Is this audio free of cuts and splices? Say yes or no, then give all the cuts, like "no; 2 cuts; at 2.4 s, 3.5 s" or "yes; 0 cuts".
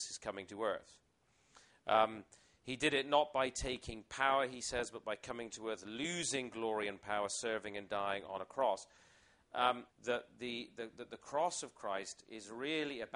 no; 1 cut; at 9.9 s